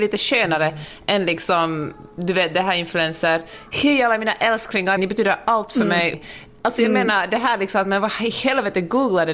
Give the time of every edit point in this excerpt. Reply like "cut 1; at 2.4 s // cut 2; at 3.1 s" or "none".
cut 1; at 5.0 s // cut 2; at 6.1 s